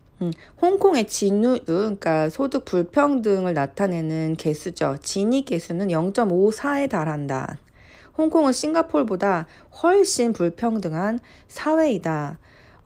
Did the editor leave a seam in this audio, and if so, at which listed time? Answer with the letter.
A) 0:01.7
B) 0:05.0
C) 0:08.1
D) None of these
A